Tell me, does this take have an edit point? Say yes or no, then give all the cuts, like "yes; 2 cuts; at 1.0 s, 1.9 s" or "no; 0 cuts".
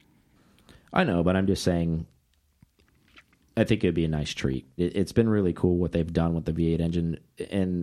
yes; 1 cut; at 4.8 s